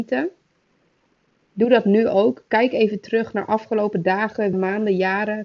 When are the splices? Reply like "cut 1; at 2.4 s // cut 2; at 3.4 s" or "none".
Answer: cut 1; at 4.5 s

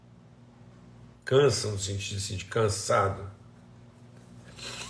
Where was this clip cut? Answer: none

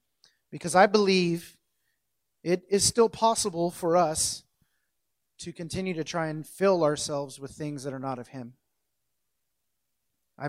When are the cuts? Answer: none

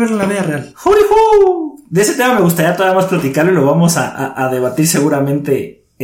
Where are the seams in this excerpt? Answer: none

